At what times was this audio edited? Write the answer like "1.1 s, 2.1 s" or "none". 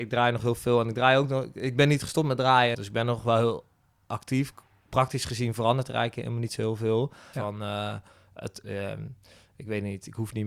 2.7 s, 7.3 s, 8.6 s